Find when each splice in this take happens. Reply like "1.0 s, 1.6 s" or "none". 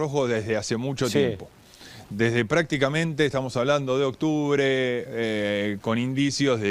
5.8 s